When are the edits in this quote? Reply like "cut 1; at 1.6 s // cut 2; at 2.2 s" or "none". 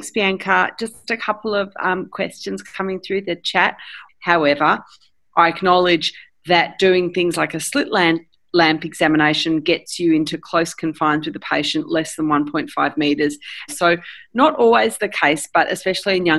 cut 1; at 4.1 s // cut 2; at 13.7 s